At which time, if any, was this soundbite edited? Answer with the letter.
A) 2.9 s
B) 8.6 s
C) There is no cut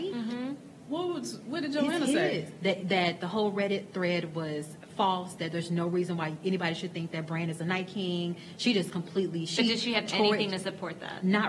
C